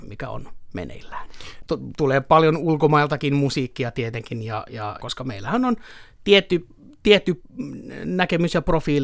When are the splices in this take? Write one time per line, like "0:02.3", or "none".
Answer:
0:01.6
0:05.0